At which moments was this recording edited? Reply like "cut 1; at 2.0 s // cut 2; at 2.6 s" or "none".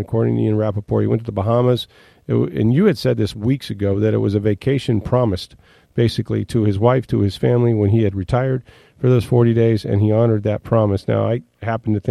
none

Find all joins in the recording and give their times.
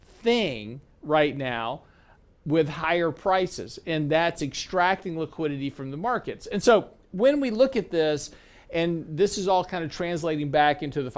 none

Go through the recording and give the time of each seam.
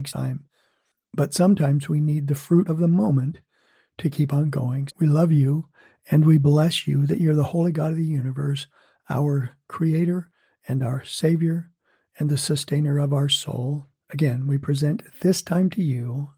cut 1; at 4.9 s // cut 2; at 14.0 s

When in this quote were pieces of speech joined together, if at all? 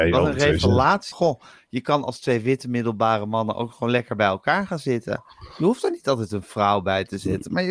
cut 1; at 1.1 s

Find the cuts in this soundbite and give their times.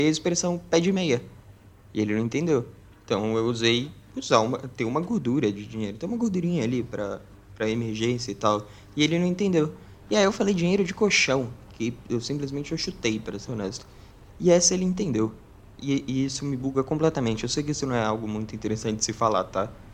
cut 1; at 13.5 s

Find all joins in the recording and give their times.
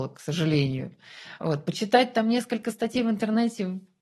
none

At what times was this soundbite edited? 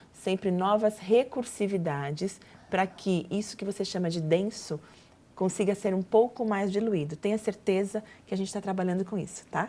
none

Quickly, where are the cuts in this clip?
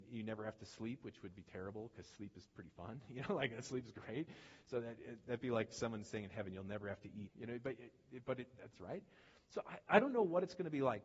cut 1; at 7.3 s // cut 2; at 8.7 s

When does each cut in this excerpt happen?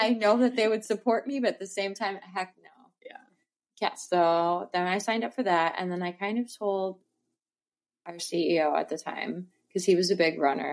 none

